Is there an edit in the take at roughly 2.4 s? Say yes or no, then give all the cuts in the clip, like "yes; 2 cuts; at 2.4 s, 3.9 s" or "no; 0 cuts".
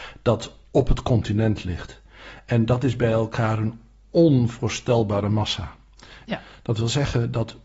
no; 1 cut; at 6.2 s